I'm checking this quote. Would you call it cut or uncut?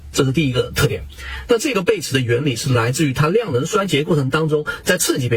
cut